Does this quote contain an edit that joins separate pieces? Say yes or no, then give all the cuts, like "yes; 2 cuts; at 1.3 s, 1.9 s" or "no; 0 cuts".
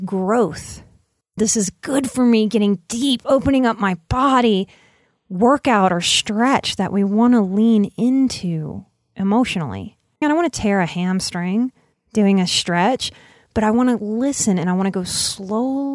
yes; 2 cuts; at 1.4 s, 10.2 s